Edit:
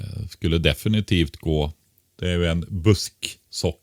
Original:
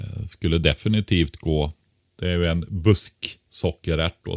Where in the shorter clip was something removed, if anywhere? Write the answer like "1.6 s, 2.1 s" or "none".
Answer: none